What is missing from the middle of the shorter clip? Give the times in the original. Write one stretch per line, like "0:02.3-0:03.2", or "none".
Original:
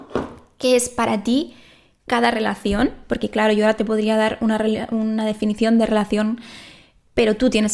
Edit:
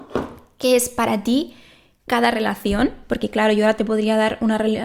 none